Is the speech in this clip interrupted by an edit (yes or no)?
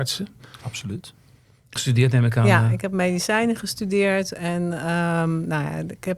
yes